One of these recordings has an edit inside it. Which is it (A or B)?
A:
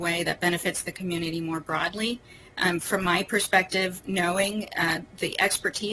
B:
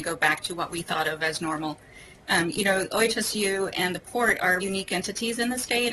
B